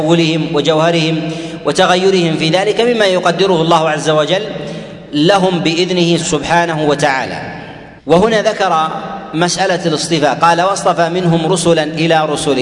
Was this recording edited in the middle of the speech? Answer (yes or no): yes